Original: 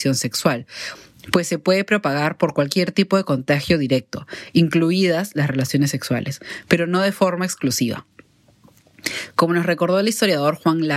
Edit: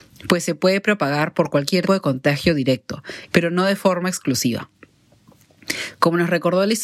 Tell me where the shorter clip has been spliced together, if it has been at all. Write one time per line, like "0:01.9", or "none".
0:01.9
0:03.3